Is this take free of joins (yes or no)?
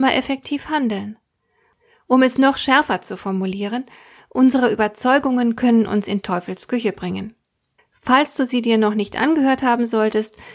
no